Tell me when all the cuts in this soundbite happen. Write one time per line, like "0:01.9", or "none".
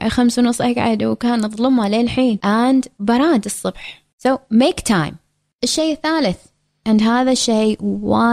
none